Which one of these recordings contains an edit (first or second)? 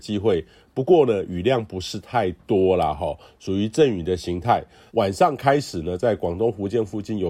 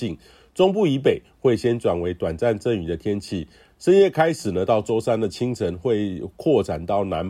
first